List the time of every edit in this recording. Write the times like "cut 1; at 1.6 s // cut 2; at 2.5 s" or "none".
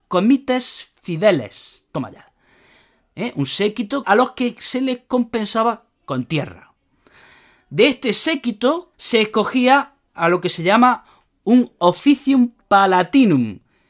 cut 1; at 4.0 s // cut 2; at 8.9 s